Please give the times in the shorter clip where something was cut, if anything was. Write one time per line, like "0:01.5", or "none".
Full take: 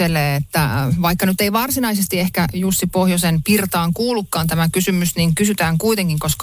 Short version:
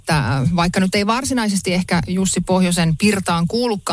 none